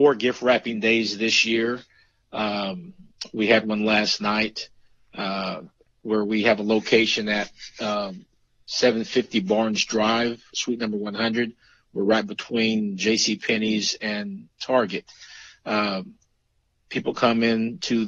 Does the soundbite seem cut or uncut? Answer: uncut